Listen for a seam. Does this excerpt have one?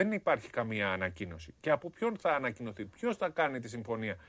no; 0 cuts

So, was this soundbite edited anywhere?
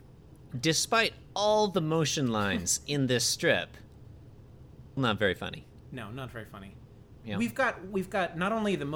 yes; 2 cuts; at 5.0 s, 7.2 s

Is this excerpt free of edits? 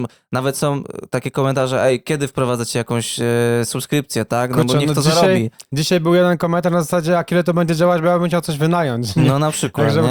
yes; 0 cuts

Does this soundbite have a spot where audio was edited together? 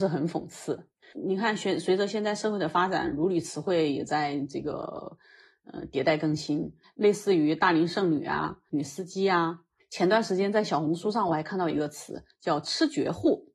yes; 1 cut; at 1.0 s

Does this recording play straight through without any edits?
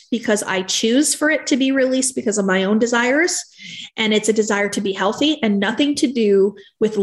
yes; 0 cuts

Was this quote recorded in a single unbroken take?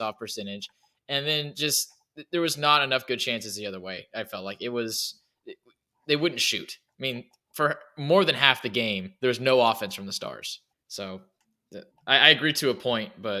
no; 2 cuts; at 10.7 s, 11.9 s

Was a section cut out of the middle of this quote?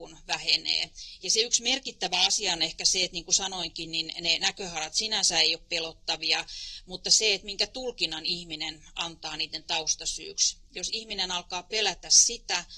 no; 0 cuts

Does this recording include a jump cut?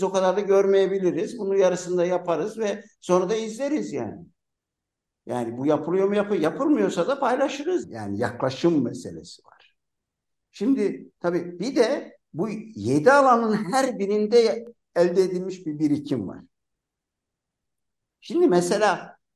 yes; 1 cut; at 7.8 s

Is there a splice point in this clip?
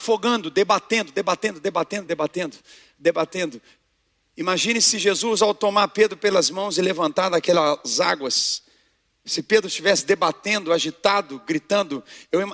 yes; 1 cut; at 2.1 s

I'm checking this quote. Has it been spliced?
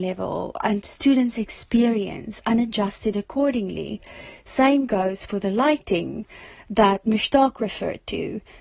no; 0 cuts

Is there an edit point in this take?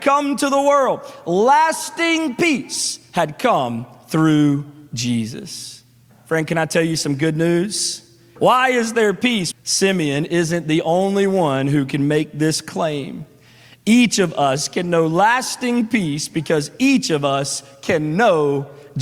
yes; 2 cuts; at 8.4 s, 9.5 s

